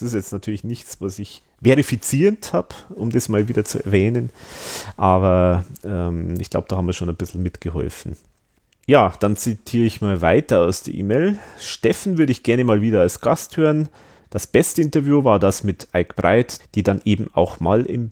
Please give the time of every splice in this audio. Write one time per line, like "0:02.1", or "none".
0:14.2
0:16.6